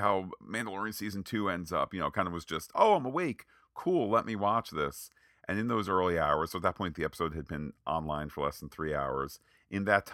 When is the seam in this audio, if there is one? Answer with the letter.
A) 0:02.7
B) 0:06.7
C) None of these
A